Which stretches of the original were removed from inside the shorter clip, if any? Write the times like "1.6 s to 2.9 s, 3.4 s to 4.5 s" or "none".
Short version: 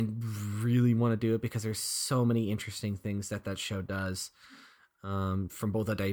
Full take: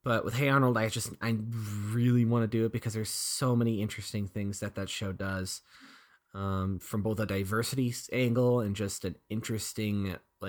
none

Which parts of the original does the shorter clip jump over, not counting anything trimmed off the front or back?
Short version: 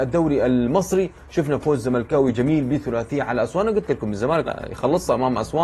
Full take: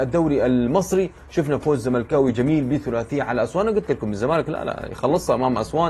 4.4 s to 4.6 s

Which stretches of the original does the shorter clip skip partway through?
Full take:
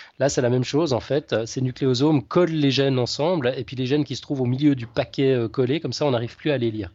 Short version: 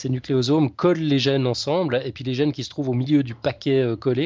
none

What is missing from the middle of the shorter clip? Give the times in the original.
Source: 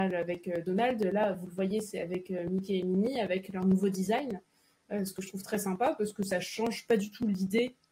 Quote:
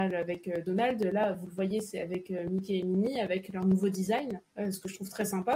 4.5 s to 4.8 s

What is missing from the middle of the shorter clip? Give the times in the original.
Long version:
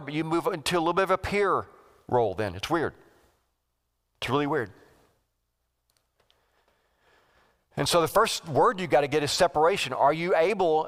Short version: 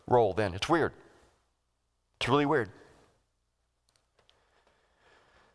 none

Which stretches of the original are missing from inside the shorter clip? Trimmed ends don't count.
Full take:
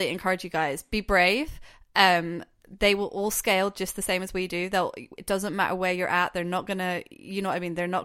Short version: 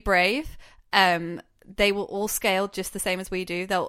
none

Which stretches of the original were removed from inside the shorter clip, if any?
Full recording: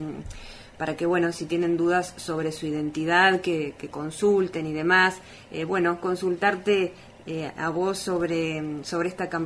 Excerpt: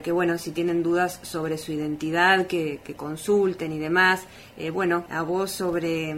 6.0 s to 7.5 s

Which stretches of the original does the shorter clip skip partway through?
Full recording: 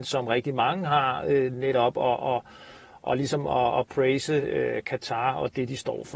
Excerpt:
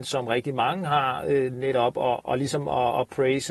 2.2 s to 3.0 s

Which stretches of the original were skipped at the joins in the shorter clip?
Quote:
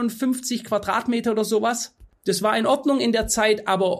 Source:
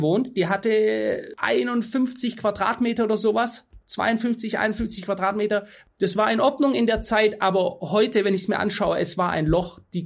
3.8 s to 5.9 s

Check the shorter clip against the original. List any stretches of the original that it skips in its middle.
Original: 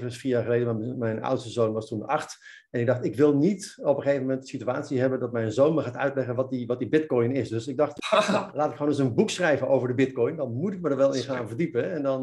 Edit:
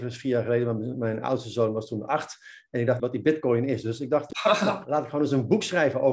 3.0 s to 6.7 s

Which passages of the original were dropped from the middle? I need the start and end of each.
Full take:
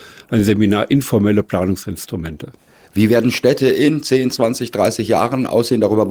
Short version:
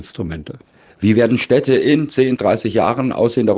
4.3 s to 4.7 s

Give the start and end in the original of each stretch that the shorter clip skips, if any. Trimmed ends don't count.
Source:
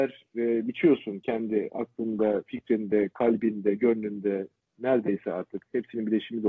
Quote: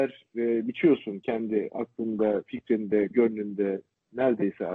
3.1 s to 3.8 s

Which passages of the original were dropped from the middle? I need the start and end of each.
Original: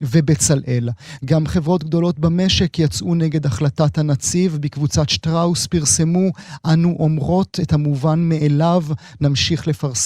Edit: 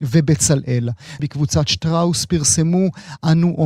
1.2 s to 4.6 s

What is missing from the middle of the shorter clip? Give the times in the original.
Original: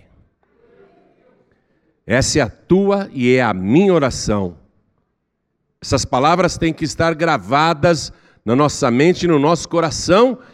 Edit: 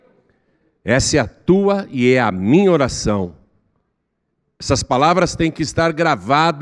none

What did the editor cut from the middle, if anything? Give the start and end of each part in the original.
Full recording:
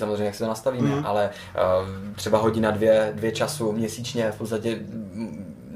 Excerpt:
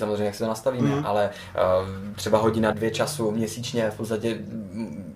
2.7 s to 3.1 s

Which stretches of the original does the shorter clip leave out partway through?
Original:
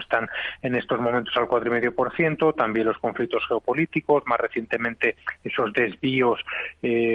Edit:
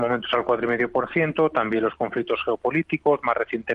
none

